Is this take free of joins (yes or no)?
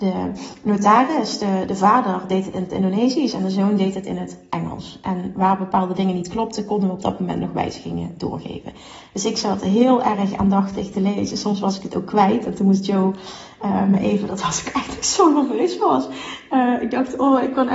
yes